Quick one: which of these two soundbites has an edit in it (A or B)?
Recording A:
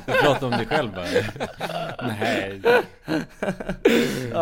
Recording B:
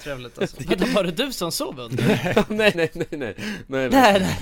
B